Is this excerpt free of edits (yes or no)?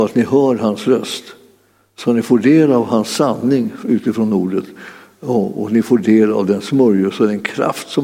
yes